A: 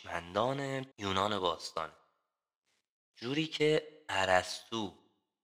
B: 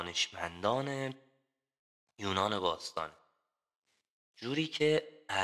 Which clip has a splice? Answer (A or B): A